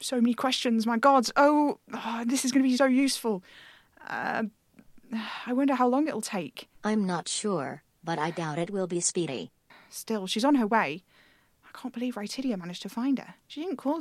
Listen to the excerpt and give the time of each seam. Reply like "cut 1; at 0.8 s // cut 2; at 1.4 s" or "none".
cut 1; at 2.8 s